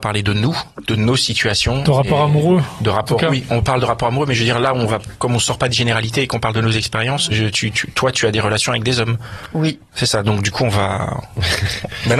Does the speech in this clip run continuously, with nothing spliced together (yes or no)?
no